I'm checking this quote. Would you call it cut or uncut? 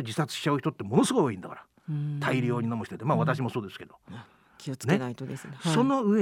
uncut